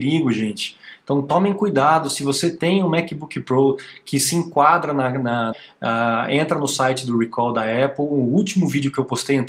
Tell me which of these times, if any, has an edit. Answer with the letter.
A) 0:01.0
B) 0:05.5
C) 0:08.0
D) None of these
B